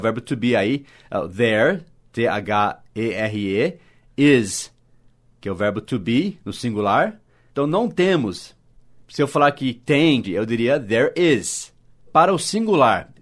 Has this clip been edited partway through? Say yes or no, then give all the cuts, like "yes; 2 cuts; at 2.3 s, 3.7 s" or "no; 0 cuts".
yes; 3 cuts; at 7.5 s, 10.2 s, 12.0 s